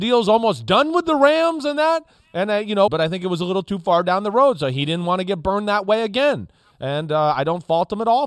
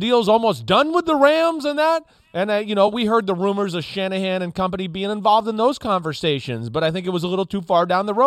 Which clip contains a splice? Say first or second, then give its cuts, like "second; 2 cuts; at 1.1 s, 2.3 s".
first; 1 cut; at 2.9 s